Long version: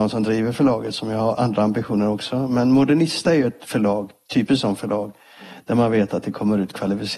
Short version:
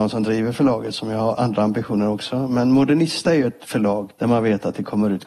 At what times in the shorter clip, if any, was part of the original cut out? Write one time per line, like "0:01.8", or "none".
0:04.1